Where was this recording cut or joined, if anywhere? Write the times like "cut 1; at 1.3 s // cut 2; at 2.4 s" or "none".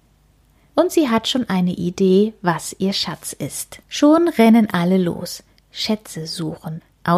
cut 1; at 3.8 s